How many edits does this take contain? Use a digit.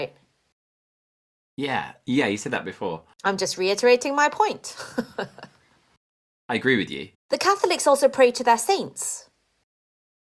1